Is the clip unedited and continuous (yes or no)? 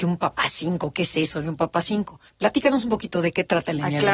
yes